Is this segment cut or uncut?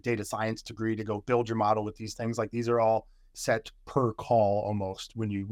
uncut